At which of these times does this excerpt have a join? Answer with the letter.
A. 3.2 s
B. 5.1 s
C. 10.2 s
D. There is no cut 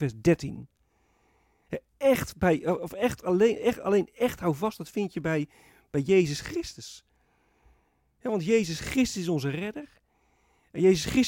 D